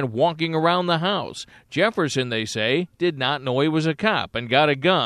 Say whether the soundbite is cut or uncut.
uncut